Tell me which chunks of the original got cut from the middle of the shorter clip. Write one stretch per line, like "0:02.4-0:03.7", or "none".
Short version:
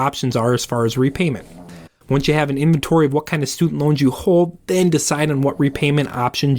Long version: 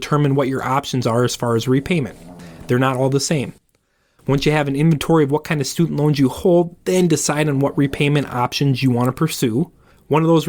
0:02.6-0:04.0